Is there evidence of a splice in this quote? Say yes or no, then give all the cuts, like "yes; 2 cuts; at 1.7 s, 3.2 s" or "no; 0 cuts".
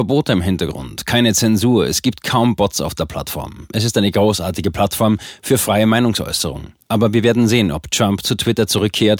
no; 0 cuts